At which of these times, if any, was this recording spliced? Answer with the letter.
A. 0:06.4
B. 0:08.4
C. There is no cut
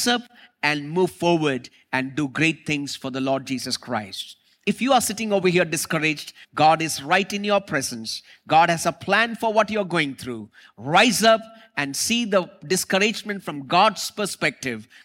A